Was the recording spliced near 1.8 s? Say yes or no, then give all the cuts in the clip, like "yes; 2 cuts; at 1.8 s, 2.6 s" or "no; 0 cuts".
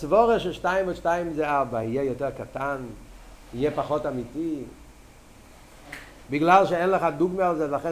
no; 0 cuts